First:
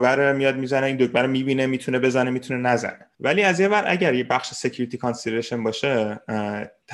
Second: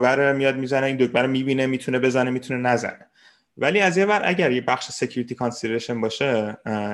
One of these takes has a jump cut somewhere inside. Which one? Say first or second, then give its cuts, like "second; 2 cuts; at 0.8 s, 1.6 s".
first; 1 cut; at 3.1 s